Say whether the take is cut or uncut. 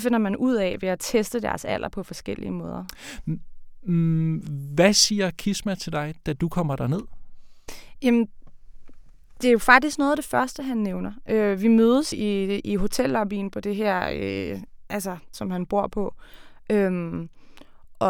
cut